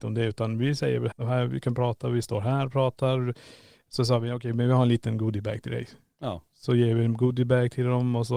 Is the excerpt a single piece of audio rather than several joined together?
no; 1 cut; at 1.1 s

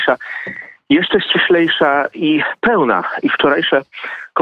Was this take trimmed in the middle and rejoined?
no; 0 cuts

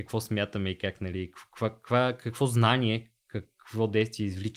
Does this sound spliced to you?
no; 0 cuts

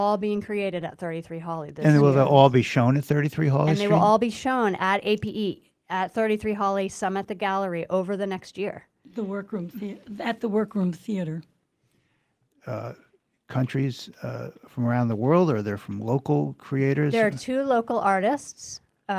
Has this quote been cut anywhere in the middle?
yes; 1 cut; at 12.5 s

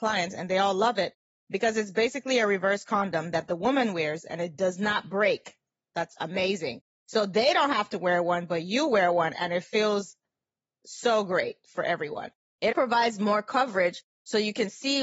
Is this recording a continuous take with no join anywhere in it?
no; 1 cut; at 12.7 s

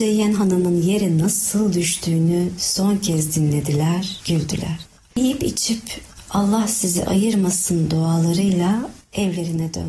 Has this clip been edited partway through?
no; 0 cuts

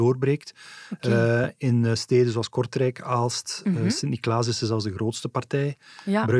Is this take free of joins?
yes; 0 cuts

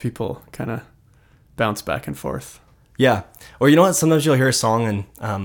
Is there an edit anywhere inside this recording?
no; 0 cuts

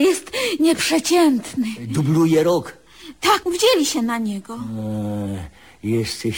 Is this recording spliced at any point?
yes; 1 cut; at 3.4 s

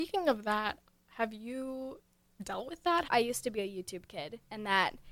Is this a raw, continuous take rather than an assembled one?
no; 1 cut; at 3.1 s

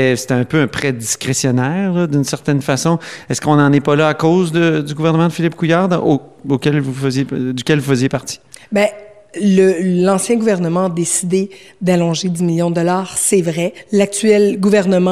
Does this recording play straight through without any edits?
yes; 0 cuts

